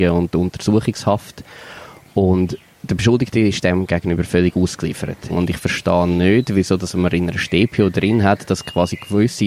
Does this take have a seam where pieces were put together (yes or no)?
yes